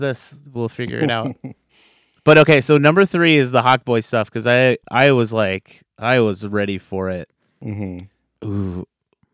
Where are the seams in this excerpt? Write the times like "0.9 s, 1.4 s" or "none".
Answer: none